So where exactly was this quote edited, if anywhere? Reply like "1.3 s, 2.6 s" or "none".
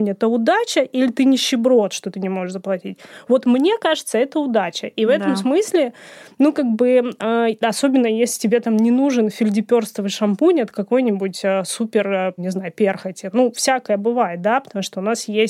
12.4 s